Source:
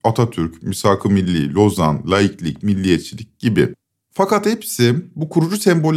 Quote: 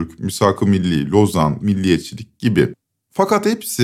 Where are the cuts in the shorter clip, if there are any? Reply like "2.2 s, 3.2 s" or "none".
1.6 s